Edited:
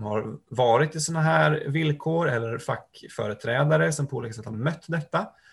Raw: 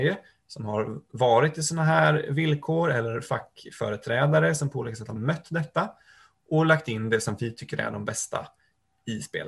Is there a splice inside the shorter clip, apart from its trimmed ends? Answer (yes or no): no